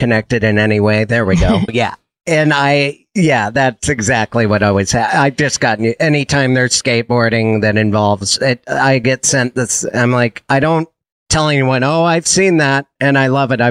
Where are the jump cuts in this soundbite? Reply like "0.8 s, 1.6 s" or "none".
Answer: 1.7 s